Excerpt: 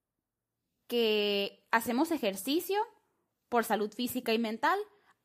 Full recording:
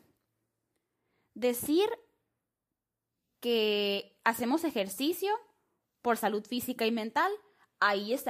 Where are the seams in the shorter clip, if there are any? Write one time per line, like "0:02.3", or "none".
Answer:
none